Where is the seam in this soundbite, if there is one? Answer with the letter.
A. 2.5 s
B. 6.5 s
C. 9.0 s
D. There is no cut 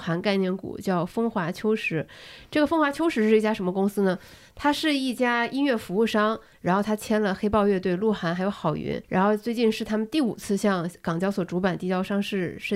C